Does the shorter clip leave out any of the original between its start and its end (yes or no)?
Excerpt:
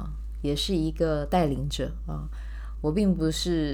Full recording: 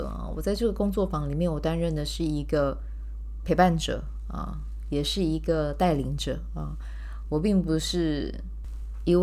no